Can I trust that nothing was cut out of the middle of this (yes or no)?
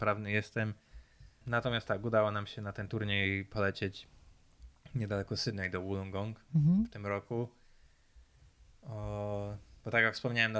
no